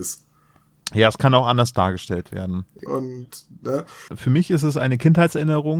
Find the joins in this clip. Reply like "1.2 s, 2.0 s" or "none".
2.9 s, 4.1 s